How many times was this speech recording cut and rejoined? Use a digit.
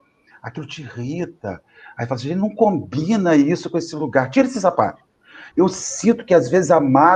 1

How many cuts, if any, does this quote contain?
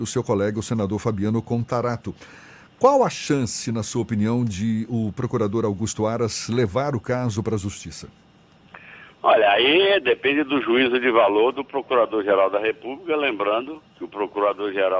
1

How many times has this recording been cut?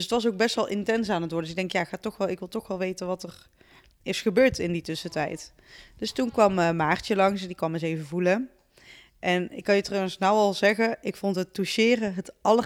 0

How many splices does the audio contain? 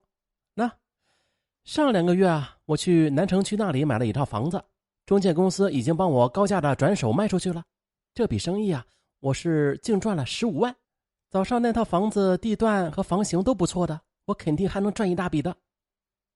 0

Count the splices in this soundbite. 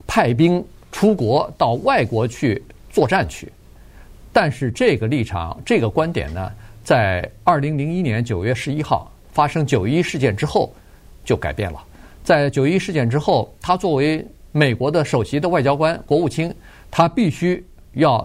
0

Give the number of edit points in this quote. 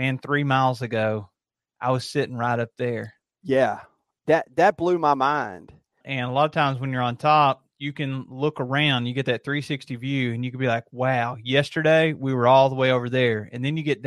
1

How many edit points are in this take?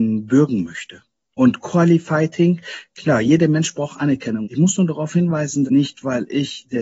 2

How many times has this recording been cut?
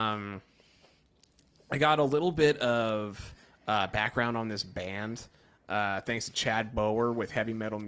0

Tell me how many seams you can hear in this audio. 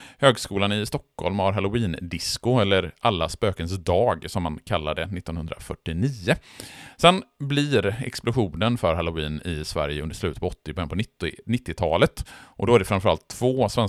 0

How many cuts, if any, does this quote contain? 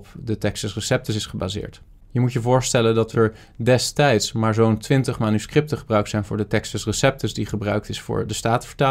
0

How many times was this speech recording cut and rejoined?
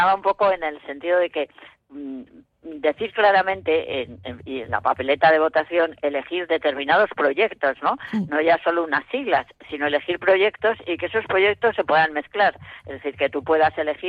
0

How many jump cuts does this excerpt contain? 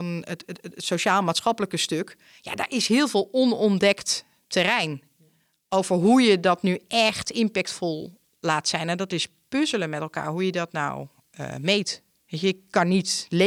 0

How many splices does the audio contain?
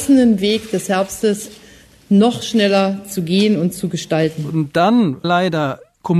1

